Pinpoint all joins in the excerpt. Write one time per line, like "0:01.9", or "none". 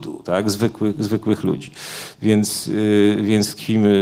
0:02.1